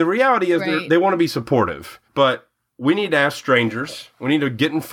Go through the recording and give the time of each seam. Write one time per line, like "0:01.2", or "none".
0:02.0